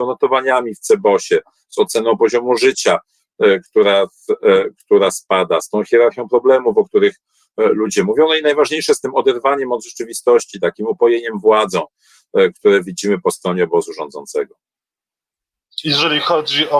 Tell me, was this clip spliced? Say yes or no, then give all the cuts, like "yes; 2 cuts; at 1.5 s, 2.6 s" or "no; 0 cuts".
no; 0 cuts